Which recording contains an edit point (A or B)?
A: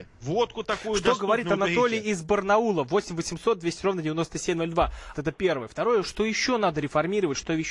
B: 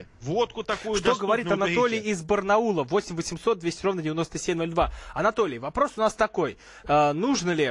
A